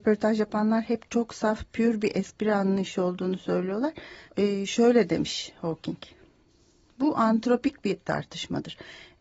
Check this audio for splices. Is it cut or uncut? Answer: cut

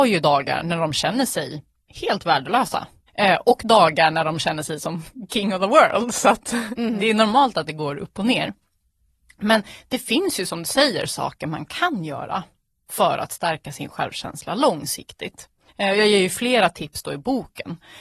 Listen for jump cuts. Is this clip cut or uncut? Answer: uncut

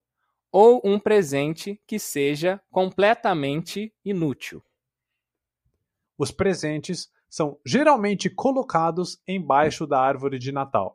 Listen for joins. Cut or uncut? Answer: cut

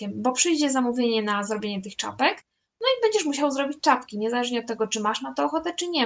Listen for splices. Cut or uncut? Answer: uncut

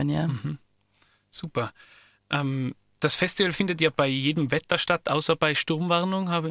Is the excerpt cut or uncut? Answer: uncut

